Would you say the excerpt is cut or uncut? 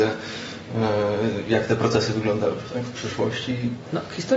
uncut